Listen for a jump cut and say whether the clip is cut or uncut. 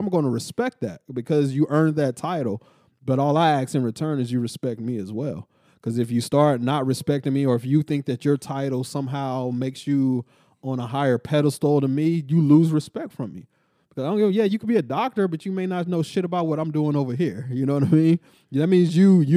uncut